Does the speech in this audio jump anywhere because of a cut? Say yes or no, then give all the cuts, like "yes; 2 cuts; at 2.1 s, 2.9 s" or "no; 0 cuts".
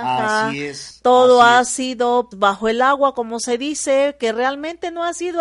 yes; 1 cut; at 2.3 s